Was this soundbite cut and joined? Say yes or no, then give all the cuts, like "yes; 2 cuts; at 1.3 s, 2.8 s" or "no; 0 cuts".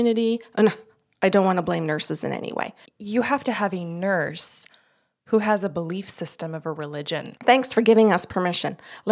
yes; 2 cuts; at 2.8 s, 7.4 s